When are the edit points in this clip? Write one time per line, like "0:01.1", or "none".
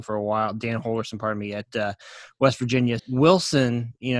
0:03.0